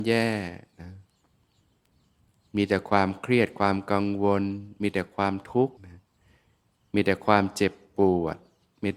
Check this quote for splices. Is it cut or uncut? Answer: cut